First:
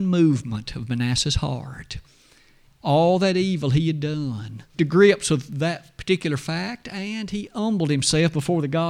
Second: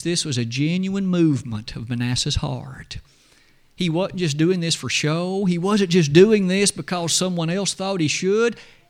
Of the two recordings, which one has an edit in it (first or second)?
first